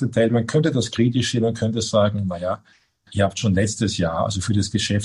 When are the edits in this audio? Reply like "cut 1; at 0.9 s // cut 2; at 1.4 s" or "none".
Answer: none

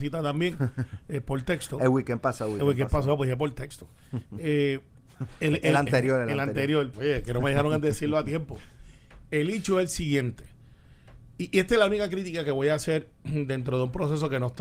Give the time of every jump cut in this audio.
cut 1; at 6.9 s

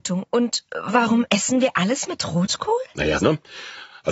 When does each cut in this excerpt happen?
cut 1; at 3.2 s

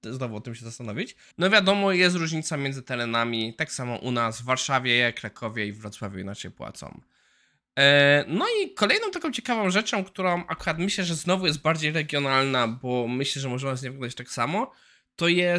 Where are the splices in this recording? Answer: cut 1; at 1.3 s

